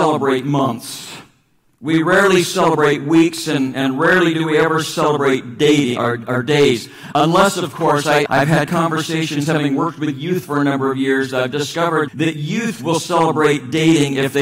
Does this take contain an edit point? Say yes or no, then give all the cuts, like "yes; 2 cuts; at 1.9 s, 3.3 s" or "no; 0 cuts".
yes; 2 cuts; at 8.3 s, 12.1 s